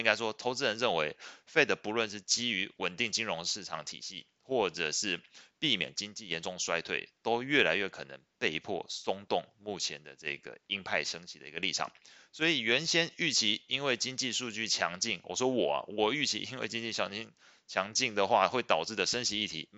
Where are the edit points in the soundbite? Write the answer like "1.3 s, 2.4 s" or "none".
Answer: none

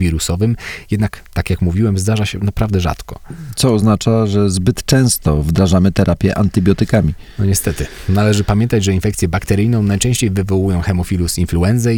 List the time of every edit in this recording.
none

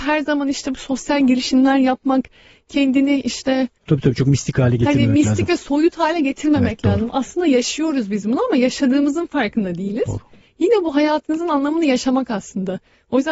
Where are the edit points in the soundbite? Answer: 10.4 s

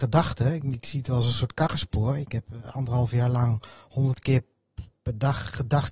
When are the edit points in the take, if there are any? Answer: none

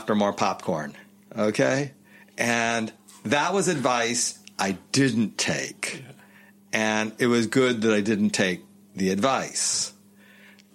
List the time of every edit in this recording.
none

